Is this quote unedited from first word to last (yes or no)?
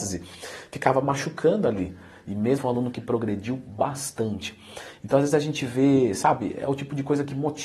no